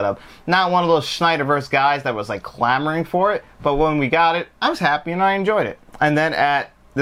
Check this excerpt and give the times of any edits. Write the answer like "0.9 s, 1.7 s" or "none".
5.9 s